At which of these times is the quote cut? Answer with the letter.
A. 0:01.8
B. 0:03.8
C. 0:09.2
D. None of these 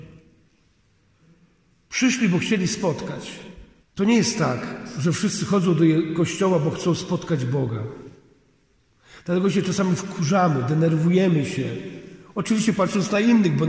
B